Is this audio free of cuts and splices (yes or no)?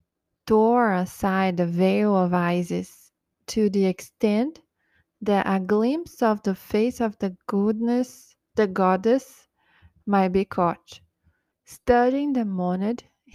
no